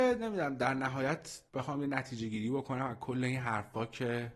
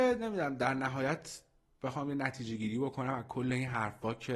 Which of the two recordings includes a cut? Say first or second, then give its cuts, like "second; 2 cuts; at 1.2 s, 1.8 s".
first; 1 cut; at 1.5 s